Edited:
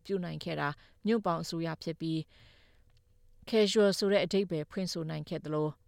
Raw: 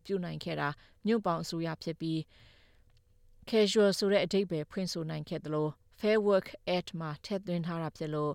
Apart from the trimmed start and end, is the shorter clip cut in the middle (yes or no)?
no